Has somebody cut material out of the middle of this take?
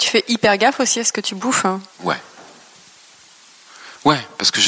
yes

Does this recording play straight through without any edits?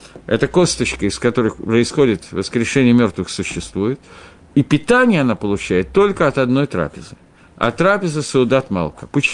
yes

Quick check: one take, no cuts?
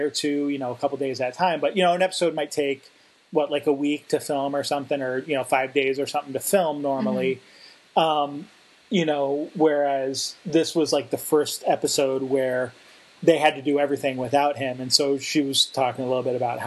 yes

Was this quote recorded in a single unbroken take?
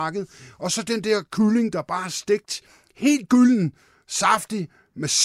yes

